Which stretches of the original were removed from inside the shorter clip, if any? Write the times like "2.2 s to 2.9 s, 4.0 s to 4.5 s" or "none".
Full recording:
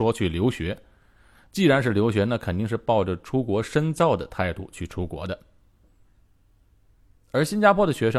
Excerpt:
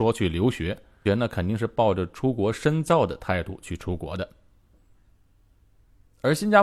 1.1 s to 2.2 s